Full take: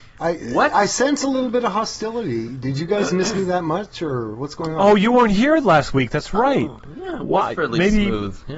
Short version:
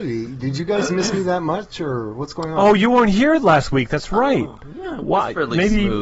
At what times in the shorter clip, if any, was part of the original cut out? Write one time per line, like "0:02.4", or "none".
none